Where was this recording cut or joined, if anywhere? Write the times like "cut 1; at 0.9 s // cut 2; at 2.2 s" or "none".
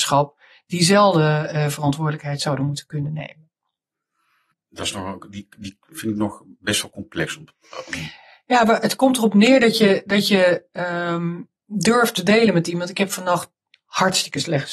cut 1; at 4.5 s